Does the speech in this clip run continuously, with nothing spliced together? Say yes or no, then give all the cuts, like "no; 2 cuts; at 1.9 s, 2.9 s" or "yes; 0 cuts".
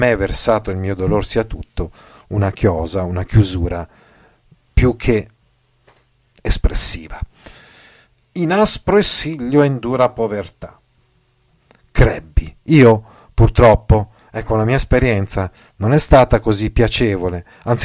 yes; 0 cuts